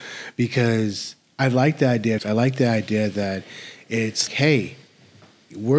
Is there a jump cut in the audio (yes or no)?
yes